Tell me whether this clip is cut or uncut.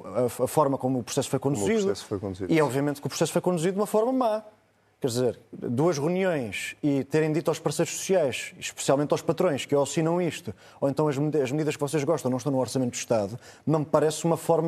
uncut